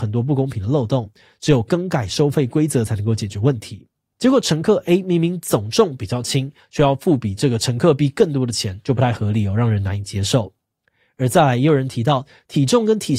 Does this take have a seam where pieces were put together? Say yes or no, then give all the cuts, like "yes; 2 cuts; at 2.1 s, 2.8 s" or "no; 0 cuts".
yes; 1 cut; at 4.2 s